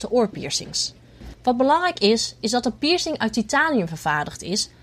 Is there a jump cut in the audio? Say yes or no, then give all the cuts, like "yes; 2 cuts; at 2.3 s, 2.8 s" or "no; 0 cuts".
yes; 1 cut; at 1.4 s